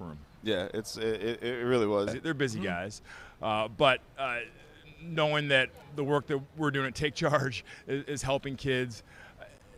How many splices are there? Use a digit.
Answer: 1